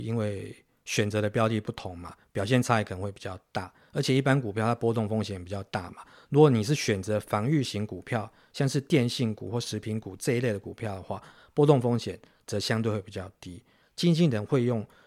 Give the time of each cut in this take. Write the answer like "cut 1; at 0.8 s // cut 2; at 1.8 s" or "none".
cut 1; at 13.8 s